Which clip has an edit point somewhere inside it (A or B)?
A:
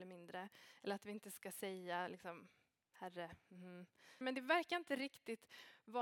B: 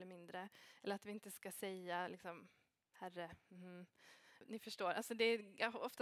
A